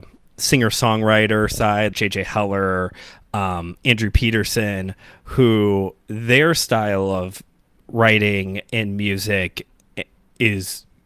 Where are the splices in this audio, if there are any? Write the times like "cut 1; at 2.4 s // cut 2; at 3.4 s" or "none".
cut 1; at 1.9 s

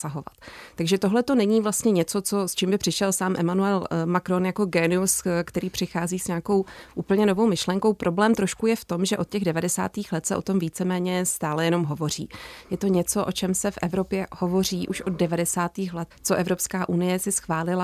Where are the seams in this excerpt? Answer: cut 1; at 12.6 s // cut 2; at 16.1 s

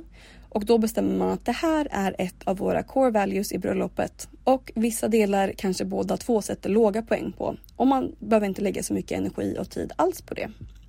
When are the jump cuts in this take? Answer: cut 1; at 4.4 s

